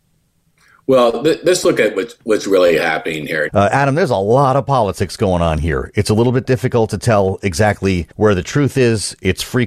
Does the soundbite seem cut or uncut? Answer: cut